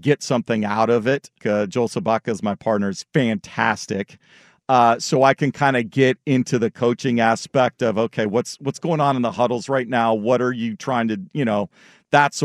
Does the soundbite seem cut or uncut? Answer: cut